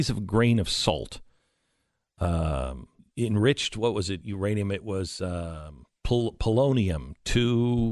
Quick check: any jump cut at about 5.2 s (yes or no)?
no